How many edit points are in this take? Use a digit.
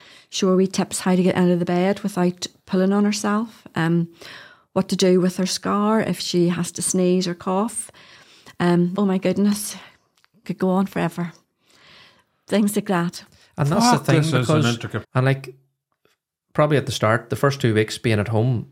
2